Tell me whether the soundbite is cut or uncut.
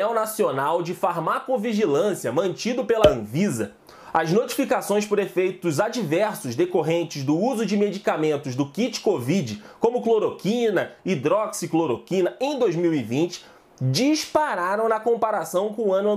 uncut